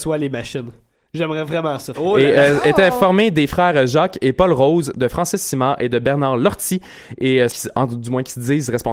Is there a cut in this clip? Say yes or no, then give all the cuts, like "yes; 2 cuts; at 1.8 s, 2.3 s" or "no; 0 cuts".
yes; 2 cuts; at 1.9 s, 7.5 s